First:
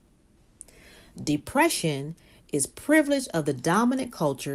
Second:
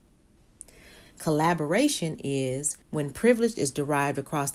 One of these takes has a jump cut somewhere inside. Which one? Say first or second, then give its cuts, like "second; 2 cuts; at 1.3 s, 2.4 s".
second; 2 cuts; at 1.1 s, 2.8 s